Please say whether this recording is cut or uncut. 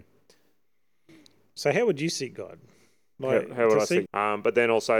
cut